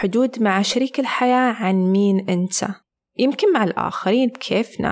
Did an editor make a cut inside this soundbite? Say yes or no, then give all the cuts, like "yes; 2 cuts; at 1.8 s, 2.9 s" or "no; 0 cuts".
yes; 1 cut; at 3.0 s